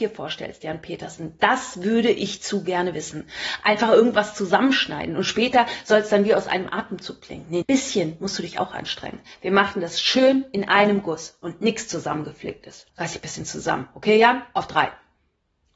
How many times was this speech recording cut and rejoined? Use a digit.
2